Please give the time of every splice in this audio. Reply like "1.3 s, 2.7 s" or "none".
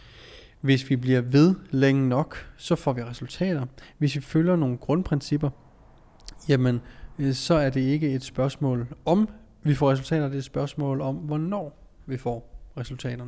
none